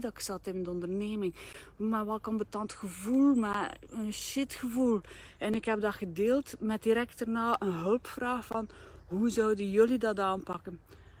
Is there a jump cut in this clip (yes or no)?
no